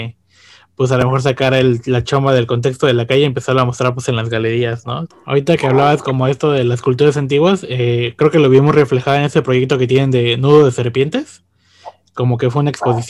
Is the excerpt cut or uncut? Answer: cut